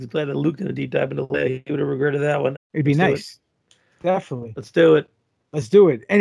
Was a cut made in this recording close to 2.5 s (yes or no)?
yes